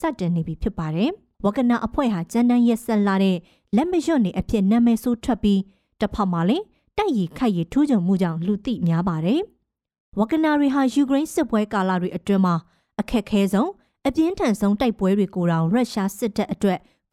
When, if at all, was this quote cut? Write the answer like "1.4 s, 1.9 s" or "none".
1.3 s